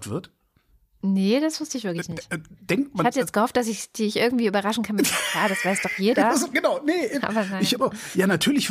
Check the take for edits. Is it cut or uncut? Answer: uncut